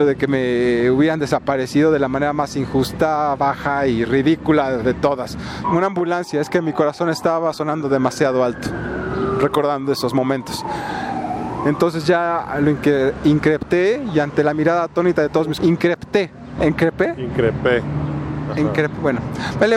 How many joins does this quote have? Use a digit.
3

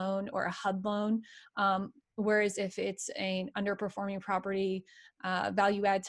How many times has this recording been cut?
1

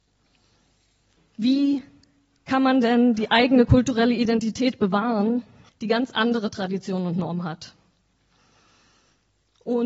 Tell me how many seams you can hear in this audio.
2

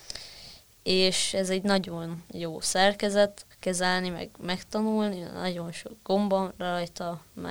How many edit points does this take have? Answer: 1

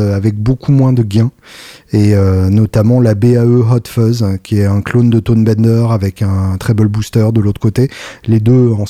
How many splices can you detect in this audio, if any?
0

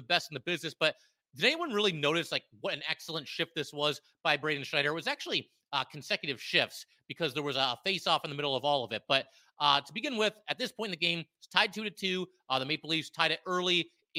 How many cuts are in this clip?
0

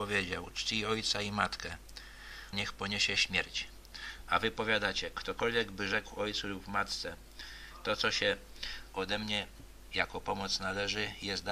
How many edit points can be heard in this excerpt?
1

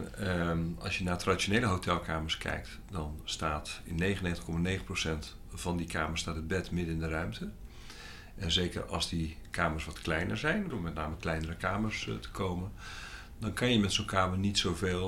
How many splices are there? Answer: 1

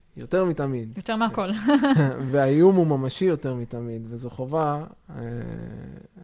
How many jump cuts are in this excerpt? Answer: 0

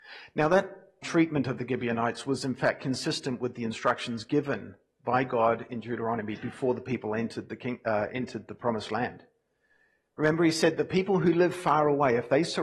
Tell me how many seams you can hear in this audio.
1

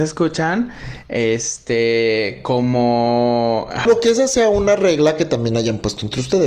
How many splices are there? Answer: 1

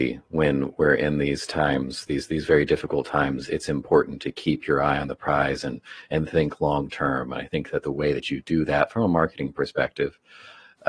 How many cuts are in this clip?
1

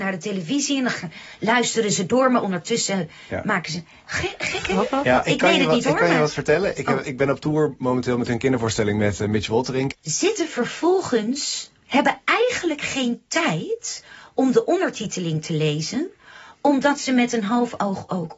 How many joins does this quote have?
1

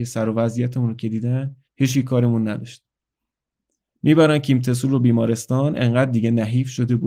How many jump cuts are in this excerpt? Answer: 1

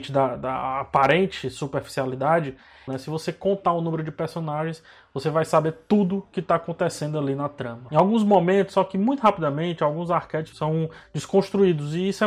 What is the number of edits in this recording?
3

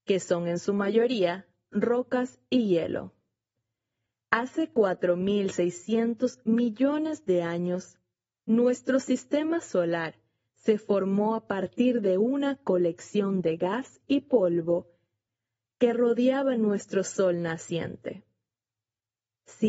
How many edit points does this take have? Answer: 0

